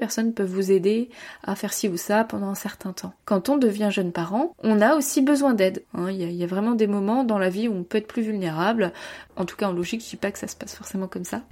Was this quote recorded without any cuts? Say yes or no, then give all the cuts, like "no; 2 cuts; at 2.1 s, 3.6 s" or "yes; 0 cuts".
no; 3 cuts; at 3.2 s, 5.8 s, 9.3 s